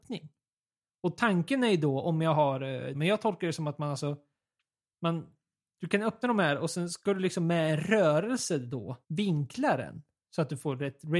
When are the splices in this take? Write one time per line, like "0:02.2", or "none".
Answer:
0:02.9
0:05.8
0:09.0